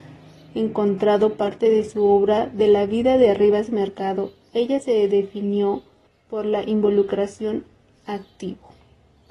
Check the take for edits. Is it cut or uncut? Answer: uncut